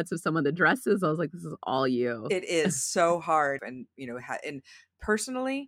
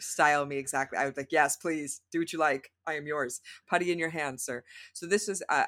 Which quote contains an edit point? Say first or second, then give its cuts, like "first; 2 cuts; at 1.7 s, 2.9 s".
first; 1 cut; at 3.6 s